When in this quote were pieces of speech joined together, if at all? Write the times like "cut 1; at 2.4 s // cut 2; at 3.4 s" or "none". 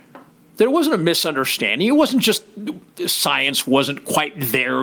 none